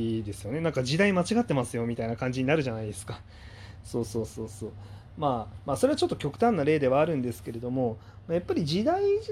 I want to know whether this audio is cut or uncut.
uncut